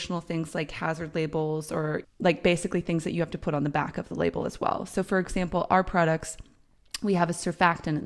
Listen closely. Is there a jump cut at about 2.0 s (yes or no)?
yes